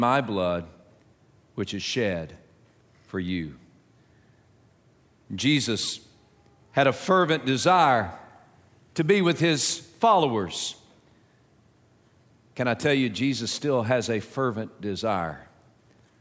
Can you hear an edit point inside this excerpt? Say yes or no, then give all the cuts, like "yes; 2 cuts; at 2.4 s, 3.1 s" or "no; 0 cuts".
no; 0 cuts